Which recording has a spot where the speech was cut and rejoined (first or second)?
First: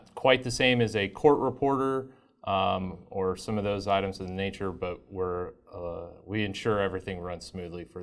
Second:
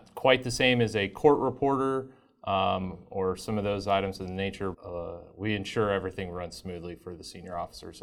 second